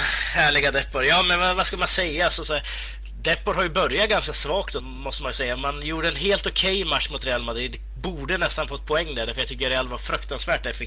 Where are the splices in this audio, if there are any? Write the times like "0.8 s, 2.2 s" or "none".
4.8 s